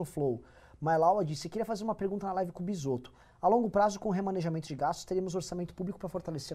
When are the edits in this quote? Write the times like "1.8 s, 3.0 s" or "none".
none